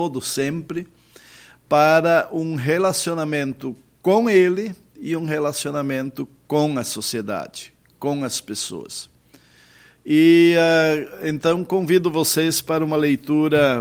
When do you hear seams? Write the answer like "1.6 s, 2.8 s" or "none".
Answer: none